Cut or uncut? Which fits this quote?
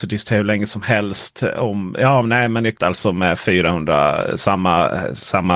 cut